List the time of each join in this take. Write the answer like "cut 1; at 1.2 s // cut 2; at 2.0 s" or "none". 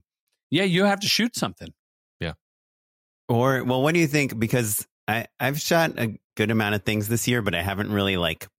cut 1; at 5.0 s